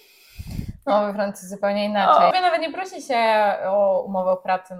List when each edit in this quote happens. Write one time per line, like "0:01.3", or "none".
0:02.3